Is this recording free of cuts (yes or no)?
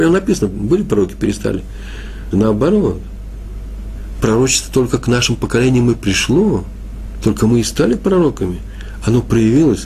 no